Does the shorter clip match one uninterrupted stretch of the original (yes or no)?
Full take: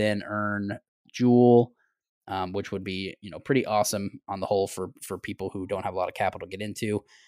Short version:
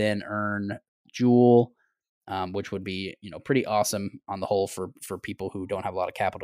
yes